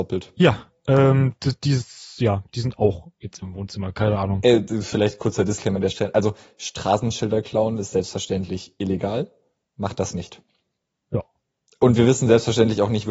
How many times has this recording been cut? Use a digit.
0